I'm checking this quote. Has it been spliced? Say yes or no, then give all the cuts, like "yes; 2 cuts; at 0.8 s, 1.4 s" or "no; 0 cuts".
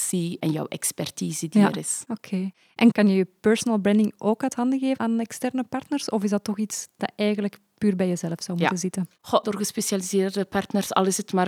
yes; 1 cut; at 9.4 s